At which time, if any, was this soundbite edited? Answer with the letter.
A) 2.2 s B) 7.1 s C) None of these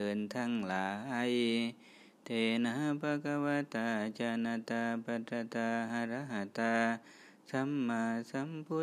C